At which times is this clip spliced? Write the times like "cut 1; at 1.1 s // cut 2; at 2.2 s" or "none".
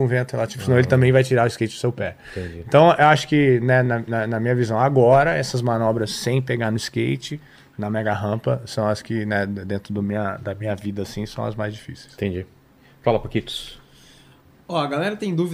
none